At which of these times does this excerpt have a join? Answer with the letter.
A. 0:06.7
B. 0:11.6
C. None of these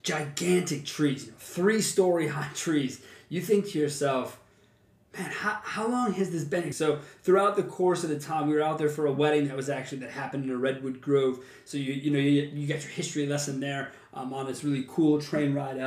A